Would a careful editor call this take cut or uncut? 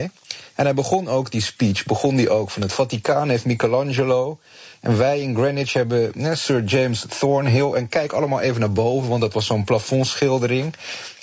uncut